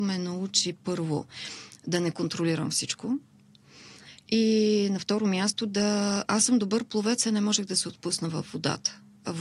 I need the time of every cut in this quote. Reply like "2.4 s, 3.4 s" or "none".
none